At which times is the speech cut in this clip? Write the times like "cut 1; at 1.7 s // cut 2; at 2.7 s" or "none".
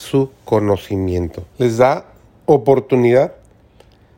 cut 1; at 1.5 s